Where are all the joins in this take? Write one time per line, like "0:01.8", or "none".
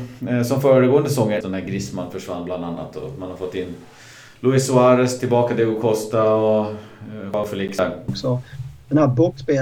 0:01.4
0:08.1